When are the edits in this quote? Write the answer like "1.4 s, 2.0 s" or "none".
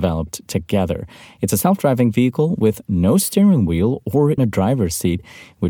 4.4 s

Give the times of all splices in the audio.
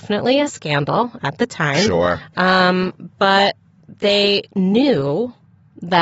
none

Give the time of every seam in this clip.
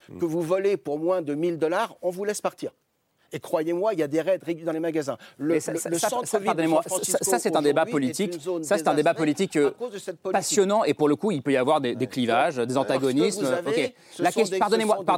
none

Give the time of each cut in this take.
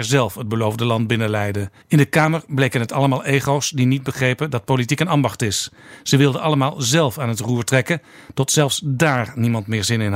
1.8 s

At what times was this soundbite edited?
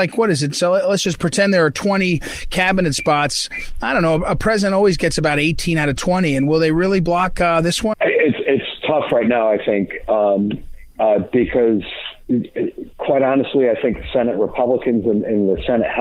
7.9 s

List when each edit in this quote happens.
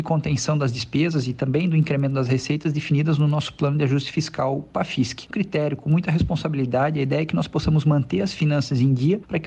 5.3 s

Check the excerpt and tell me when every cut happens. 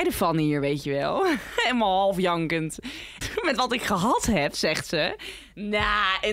3.2 s

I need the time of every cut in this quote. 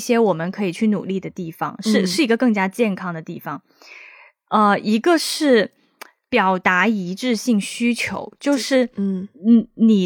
none

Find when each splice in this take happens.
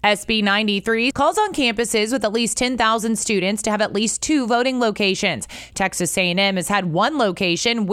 1.1 s

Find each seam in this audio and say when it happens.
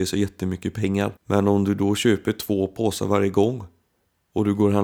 1.2 s

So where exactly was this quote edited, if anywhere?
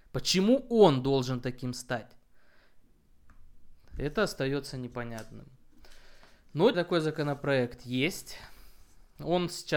6.7 s

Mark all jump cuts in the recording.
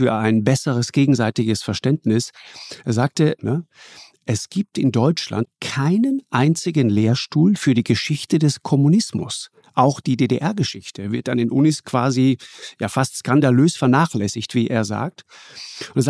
3.4 s, 5.4 s

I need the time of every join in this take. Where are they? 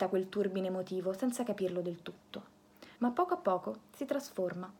2.9 s

